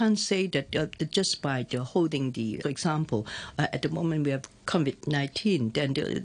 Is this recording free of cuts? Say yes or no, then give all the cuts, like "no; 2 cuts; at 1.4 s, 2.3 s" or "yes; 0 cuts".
no; 1 cut; at 2.6 s